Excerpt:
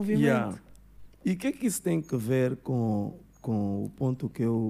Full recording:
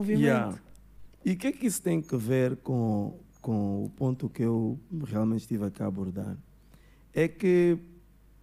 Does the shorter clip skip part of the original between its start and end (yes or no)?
no